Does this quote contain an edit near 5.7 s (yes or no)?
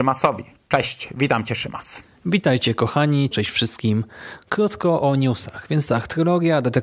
no